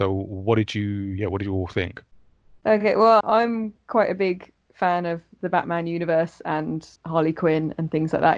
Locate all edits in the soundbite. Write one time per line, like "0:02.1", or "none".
0:03.2
0:07.0